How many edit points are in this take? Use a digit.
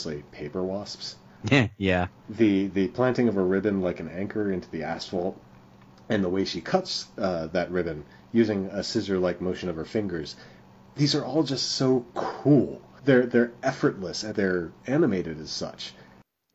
2